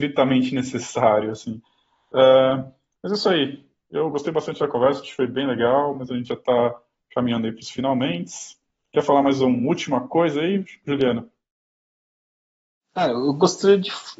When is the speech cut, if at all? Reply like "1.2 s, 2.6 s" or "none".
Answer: none